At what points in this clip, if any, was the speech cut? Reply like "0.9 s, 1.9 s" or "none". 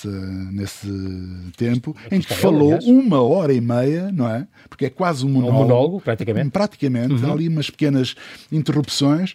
none